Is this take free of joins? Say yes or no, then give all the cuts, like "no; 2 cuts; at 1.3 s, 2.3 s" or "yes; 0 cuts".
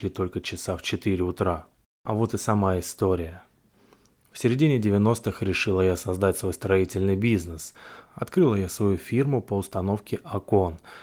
no; 1 cut; at 8.1 s